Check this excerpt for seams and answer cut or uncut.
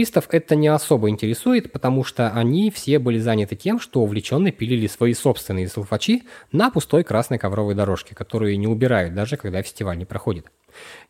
uncut